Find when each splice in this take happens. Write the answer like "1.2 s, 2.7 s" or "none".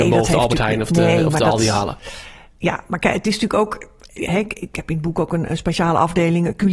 none